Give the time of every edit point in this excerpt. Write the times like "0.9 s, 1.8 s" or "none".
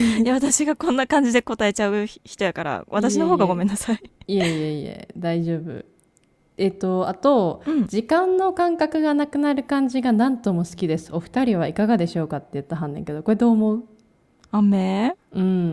none